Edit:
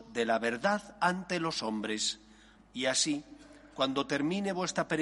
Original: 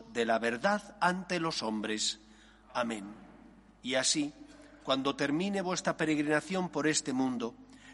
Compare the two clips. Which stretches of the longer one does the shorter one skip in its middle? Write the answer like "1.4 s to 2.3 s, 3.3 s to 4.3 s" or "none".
2.5 s to 3.6 s